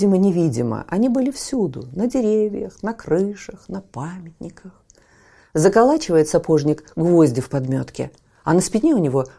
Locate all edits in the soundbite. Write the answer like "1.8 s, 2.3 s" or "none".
none